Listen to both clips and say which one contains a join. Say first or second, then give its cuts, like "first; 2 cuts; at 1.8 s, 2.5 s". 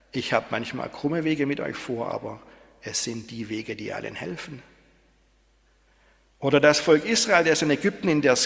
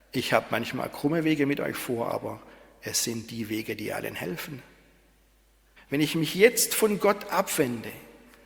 second; 1 cut; at 5.8 s